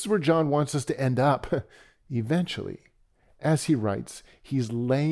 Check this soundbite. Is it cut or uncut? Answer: uncut